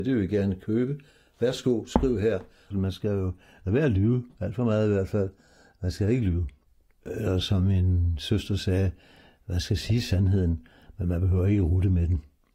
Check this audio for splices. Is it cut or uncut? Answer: cut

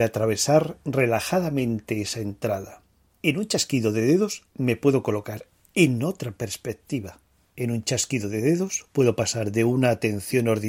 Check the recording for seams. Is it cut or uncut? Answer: uncut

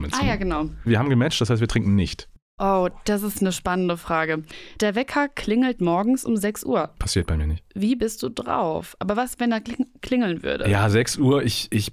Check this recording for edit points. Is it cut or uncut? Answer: uncut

